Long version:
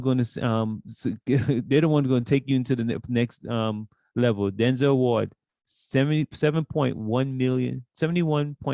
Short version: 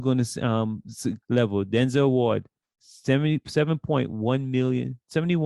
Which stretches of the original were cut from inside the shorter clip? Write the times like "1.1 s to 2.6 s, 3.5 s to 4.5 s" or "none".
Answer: 1.2 s to 4.1 s

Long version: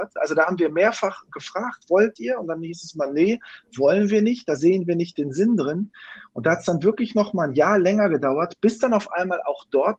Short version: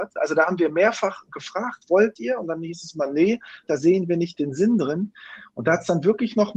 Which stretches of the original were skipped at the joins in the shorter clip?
3.7 s to 4.4 s

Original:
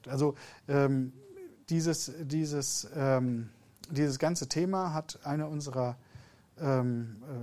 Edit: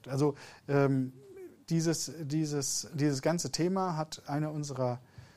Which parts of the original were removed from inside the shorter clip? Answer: 2.9 s to 3.9 s

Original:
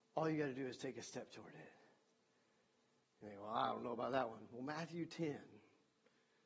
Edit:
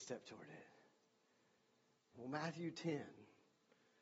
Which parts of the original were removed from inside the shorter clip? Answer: 3.2 s to 4.5 s

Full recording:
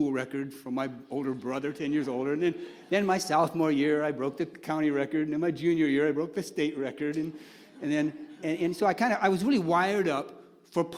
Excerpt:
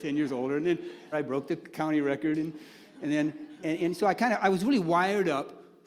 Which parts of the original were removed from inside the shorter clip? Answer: 2.9 s to 4.0 s, 5.2 s to 7.1 s

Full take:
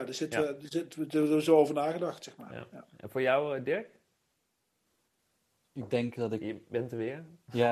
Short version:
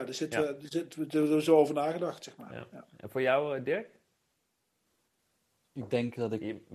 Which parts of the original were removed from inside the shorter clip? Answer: none

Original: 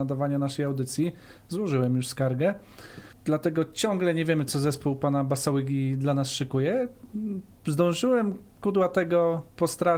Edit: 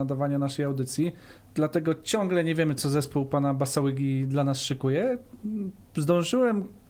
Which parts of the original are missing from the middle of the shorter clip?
1.5 s to 3.2 s

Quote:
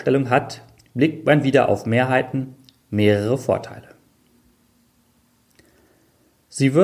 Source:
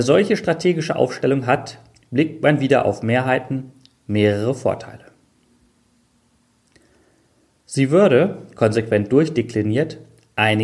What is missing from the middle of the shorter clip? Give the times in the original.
none

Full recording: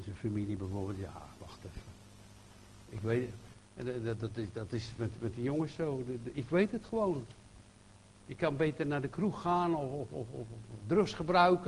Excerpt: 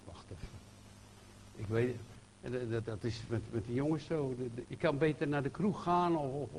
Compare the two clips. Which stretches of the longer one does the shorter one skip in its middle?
4.2 s to 4.5 s, 6.3 s to 8.2 s

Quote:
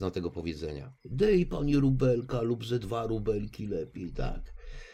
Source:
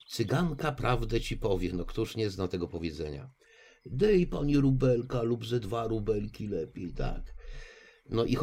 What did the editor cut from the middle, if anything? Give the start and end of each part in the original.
3.4 s to 3.8 s

